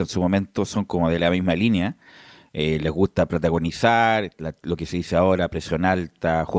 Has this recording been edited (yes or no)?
no